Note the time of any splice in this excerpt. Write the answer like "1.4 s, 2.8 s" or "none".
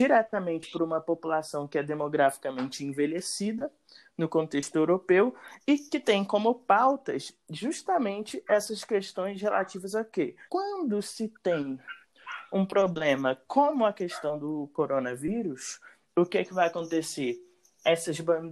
10.5 s